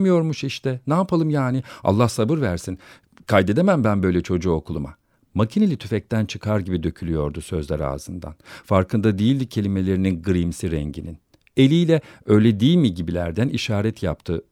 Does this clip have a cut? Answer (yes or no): no